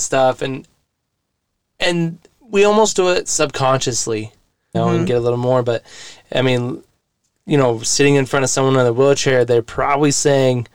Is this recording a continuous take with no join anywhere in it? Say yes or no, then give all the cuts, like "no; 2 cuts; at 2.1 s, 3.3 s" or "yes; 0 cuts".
no; 1 cut; at 4.7 s